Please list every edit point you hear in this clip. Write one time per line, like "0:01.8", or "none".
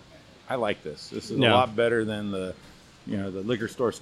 none